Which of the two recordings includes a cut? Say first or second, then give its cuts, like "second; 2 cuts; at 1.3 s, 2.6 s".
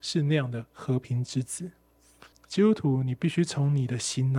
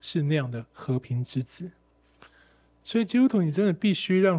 first; 1 cut; at 2.3 s